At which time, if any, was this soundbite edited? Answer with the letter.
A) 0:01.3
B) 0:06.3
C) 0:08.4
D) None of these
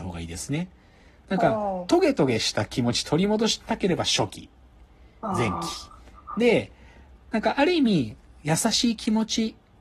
D